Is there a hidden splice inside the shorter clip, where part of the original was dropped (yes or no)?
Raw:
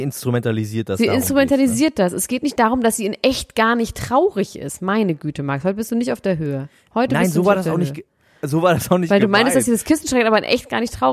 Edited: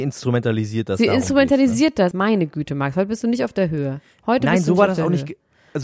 yes